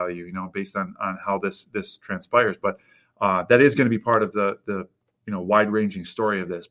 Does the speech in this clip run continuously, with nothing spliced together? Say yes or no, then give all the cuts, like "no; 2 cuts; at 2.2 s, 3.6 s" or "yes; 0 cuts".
yes; 0 cuts